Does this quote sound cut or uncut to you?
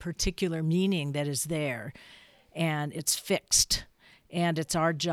uncut